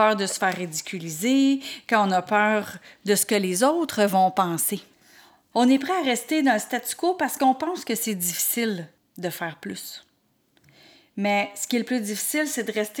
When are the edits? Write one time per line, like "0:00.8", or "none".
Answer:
0:05.5